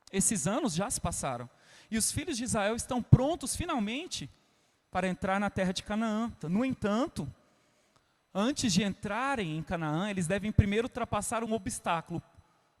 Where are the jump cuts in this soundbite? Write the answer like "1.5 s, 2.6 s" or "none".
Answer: 6.4 s, 11.5 s